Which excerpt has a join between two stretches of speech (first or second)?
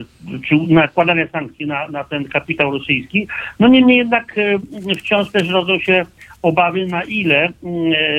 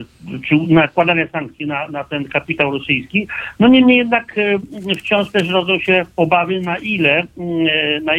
second